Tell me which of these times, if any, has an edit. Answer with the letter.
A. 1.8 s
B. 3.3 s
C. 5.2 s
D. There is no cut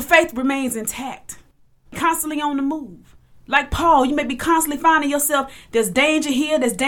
A